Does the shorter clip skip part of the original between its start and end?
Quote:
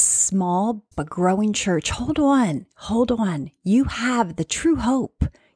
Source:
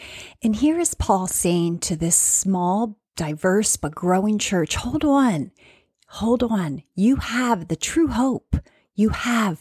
yes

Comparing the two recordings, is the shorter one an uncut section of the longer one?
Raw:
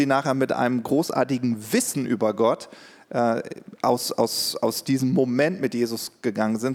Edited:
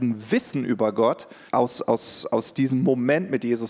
no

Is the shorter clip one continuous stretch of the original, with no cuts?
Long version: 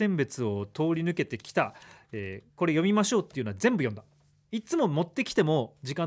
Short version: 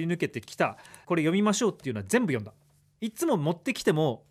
no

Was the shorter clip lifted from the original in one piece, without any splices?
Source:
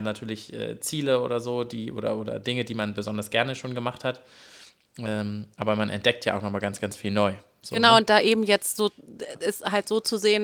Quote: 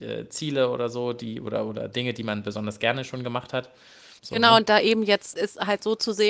no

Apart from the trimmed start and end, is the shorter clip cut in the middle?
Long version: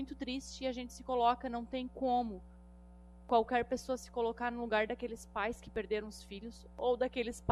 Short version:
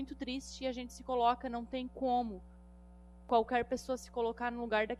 no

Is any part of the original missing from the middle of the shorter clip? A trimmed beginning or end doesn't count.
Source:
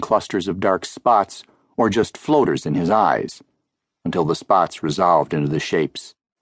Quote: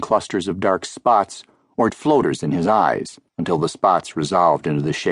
yes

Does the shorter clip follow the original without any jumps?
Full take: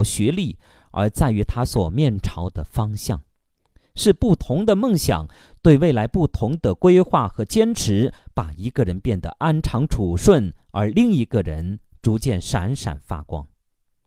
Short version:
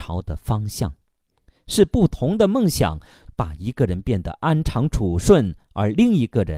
no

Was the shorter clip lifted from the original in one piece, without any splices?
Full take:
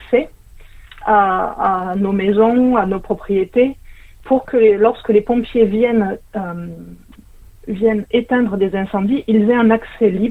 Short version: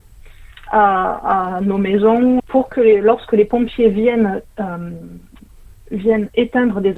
no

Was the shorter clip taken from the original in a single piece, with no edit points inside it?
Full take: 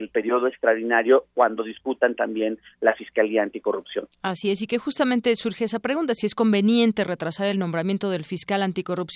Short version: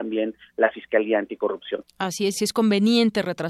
no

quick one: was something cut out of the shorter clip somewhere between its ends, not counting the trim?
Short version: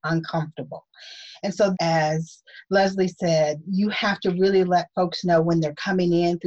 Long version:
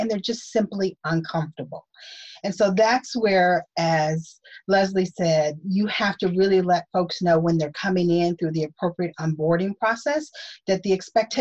yes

